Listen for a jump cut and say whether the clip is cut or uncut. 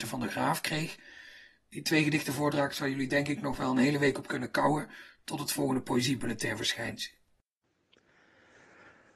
uncut